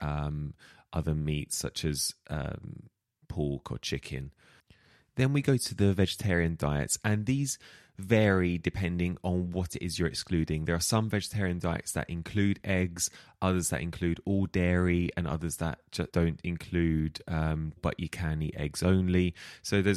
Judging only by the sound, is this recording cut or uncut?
cut